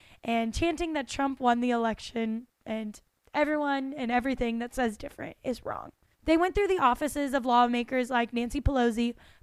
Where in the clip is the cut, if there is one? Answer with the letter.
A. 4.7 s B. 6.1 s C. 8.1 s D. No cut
B